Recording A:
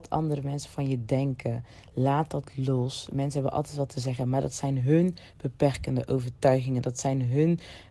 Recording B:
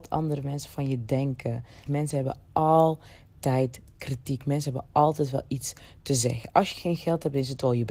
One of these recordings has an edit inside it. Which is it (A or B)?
B